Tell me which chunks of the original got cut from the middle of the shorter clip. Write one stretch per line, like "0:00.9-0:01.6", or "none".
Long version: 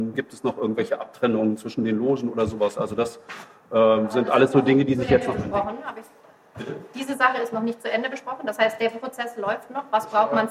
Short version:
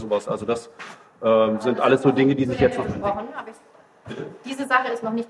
none